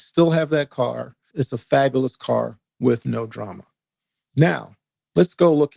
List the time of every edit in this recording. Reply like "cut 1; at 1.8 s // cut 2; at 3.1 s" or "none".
cut 1; at 1.3 s

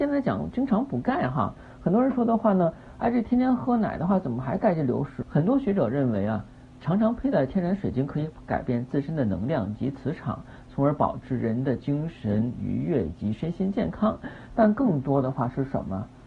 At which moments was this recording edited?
cut 1; at 5.2 s // cut 2; at 14.5 s

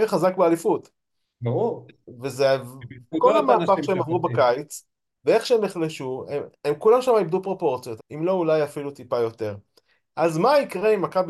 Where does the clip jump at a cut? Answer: cut 1; at 3.1 s // cut 2; at 6.6 s // cut 3; at 8.0 s

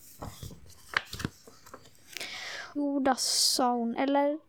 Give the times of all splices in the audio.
cut 1; at 2.8 s

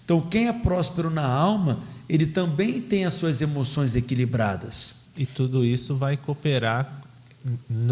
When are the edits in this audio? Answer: cut 1; at 5.0 s

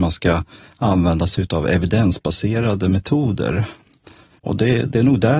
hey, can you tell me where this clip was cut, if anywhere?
cut 1; at 4.4 s

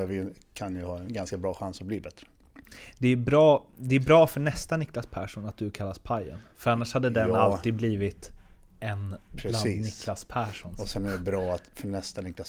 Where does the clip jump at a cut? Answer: none

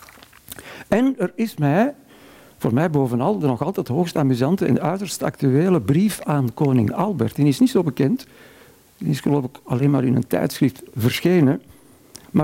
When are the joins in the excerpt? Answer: none

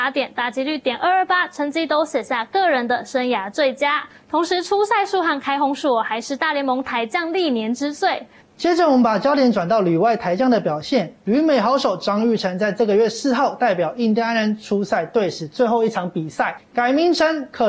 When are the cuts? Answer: cut 1; at 8.4 s // cut 2; at 16.6 s

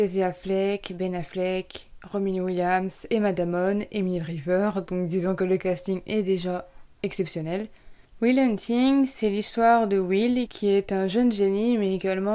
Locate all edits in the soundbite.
none

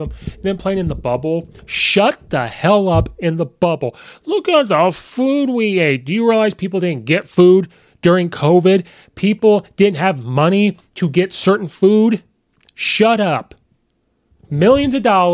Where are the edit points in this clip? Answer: none

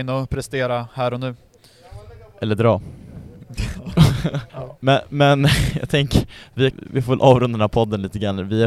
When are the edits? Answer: cut 1; at 4.5 s // cut 2; at 6.7 s

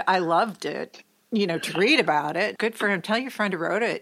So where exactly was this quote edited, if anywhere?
cut 1; at 2.6 s

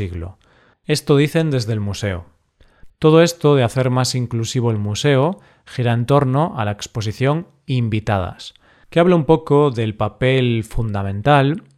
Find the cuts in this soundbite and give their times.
cut 1; at 2.9 s

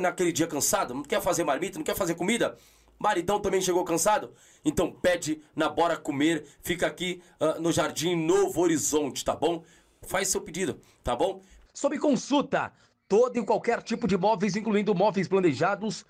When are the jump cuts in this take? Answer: cut 1; at 10.0 s // cut 2; at 11.7 s

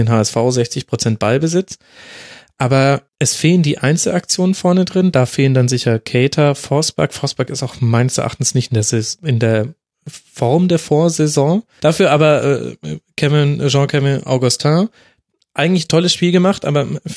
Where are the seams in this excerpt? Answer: cut 1; at 3.1 s // cut 2; at 11.8 s

